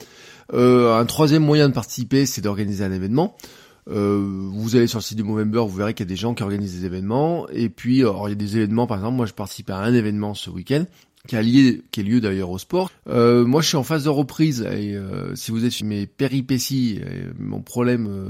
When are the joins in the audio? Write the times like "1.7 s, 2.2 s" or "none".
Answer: 12.9 s, 15.8 s